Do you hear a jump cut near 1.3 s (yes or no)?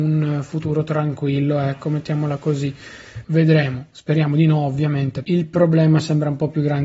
no